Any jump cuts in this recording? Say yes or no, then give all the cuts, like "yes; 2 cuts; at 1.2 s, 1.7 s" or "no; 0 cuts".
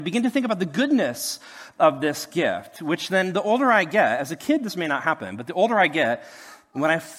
no; 0 cuts